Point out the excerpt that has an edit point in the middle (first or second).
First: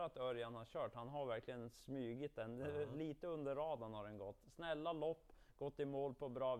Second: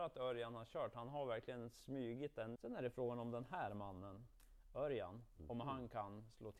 second